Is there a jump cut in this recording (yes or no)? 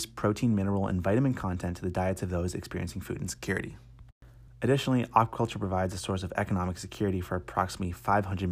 yes